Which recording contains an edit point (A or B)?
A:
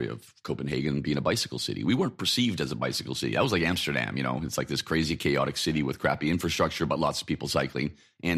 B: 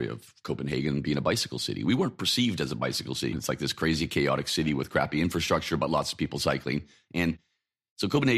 B